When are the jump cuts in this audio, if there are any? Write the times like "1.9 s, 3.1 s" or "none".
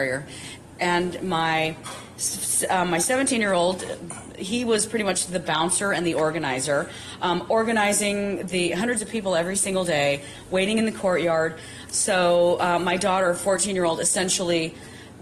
11.9 s